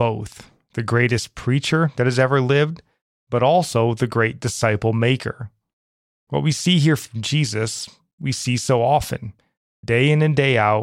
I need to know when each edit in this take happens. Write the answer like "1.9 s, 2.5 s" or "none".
none